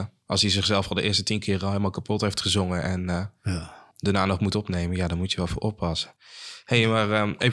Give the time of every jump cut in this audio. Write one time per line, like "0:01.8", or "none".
0:03.9